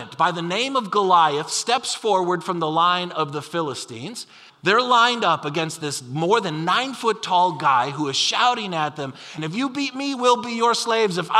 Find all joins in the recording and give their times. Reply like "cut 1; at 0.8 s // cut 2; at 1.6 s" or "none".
cut 1; at 4.5 s // cut 2; at 9.4 s